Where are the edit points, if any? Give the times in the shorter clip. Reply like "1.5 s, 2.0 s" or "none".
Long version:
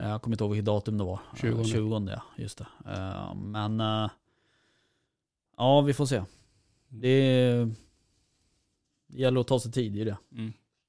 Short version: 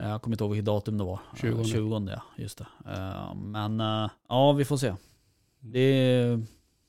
4.2 s